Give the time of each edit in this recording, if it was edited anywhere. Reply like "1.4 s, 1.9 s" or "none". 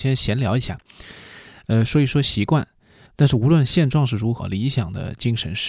3.1 s, 4.4 s